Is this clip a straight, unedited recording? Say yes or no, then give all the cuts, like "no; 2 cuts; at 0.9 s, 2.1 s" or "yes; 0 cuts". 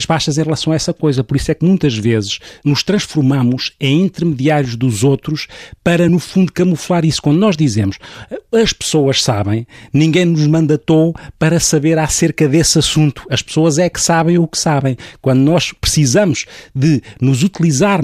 yes; 0 cuts